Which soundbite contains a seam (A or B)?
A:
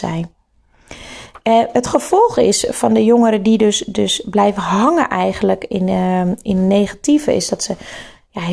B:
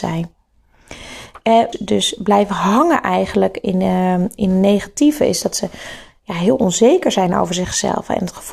B